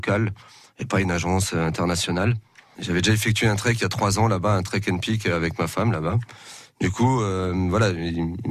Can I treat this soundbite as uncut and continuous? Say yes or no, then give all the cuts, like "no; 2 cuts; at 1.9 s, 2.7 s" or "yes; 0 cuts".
yes; 0 cuts